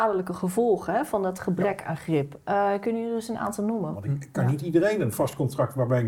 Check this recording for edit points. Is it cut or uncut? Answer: cut